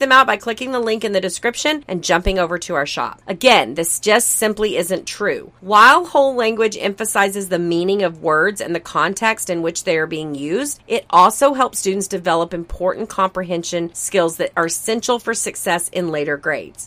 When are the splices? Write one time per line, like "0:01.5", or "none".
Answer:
0:03.2